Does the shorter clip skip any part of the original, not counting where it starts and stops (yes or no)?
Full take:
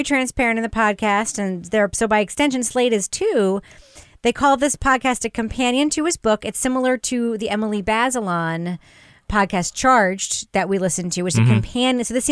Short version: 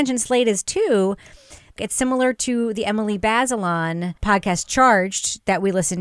yes